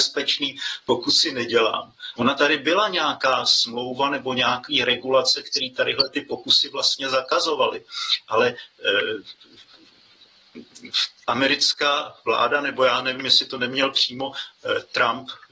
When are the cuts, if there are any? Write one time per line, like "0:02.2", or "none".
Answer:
0:02.1